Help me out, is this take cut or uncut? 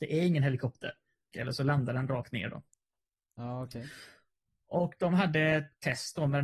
cut